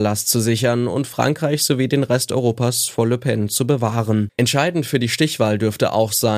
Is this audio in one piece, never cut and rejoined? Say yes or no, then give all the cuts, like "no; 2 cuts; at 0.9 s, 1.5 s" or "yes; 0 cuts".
no; 1 cut; at 4.4 s